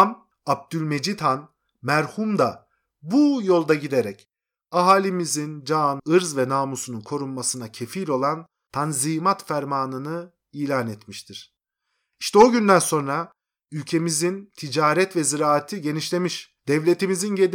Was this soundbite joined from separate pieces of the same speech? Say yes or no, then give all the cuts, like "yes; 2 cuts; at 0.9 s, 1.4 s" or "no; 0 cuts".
yes; 1 cut; at 6.0 s